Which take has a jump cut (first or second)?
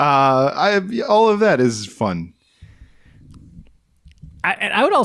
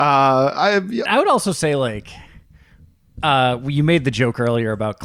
second